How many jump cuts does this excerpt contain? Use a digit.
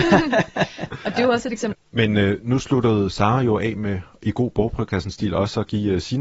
1